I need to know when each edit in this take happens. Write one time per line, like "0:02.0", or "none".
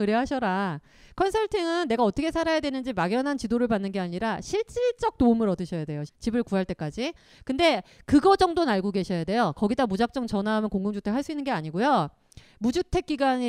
0:06.1